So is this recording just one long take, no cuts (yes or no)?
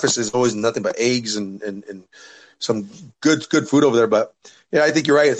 yes